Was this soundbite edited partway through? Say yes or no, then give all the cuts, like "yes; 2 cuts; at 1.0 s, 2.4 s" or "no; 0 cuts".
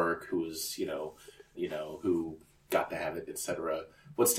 yes; 2 cuts; at 1.5 s, 3.3 s